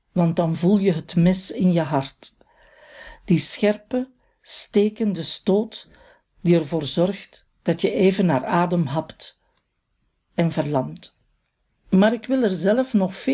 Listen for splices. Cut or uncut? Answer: cut